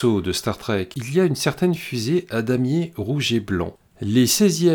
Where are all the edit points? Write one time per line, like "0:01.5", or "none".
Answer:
0:00.9